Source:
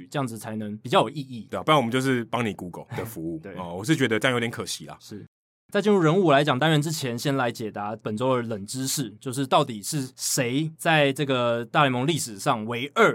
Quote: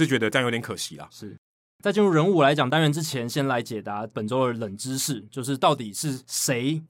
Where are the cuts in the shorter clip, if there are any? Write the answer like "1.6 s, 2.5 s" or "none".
none